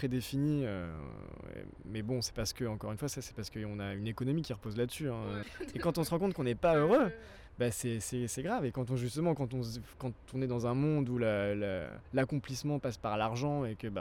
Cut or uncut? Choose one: cut